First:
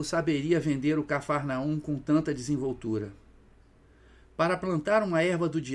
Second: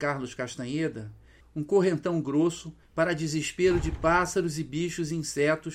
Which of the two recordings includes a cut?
second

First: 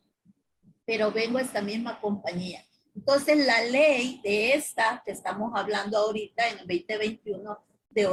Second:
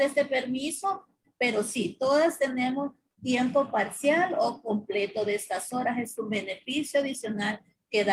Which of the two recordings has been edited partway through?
second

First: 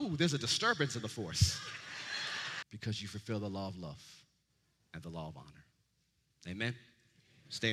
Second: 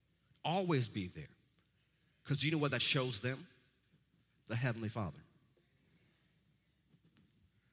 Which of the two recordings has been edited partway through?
first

